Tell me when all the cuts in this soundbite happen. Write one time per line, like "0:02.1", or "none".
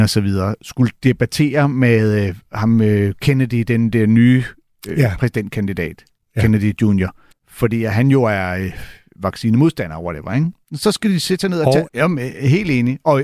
0:07.3
0:11.9